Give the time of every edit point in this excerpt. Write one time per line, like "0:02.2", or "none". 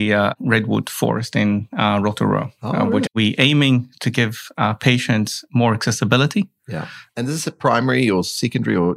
0:03.1
0:07.1